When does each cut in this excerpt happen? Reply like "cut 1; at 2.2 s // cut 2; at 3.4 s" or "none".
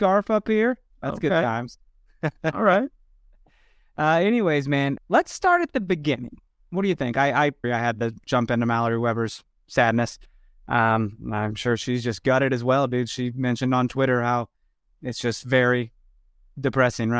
cut 1; at 5.0 s // cut 2; at 7.6 s